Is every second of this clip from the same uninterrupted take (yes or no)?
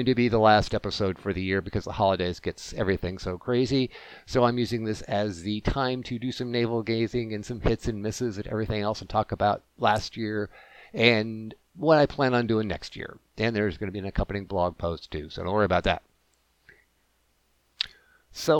yes